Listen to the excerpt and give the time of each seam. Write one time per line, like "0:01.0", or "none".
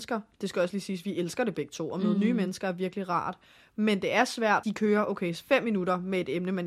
0:04.6